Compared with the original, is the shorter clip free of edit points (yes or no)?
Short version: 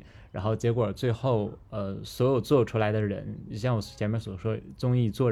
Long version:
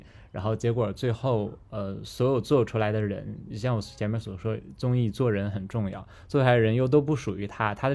yes